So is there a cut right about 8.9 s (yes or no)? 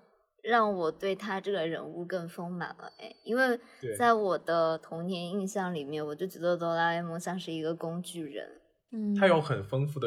yes